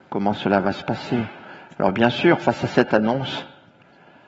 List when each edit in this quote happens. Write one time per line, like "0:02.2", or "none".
0:01.7